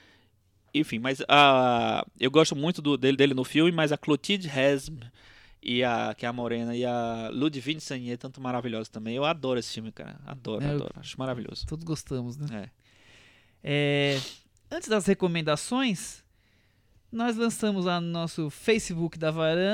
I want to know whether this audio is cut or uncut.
uncut